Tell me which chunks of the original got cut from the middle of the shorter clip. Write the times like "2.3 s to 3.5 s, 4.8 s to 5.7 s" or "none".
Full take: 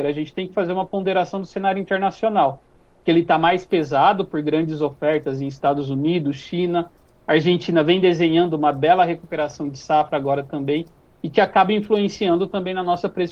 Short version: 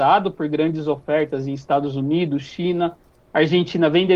none